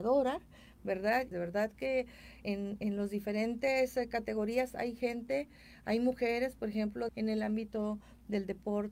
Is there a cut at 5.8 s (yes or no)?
no